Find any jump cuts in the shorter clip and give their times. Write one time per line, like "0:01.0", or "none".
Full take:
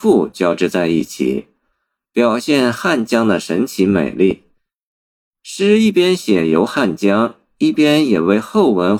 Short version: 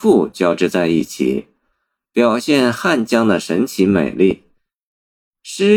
none